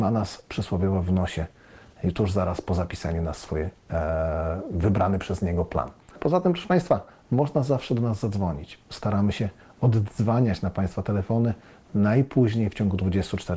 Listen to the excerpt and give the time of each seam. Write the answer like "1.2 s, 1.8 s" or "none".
6.1 s